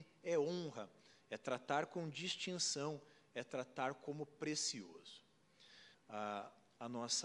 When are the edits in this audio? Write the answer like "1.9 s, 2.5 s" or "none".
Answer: 5.9 s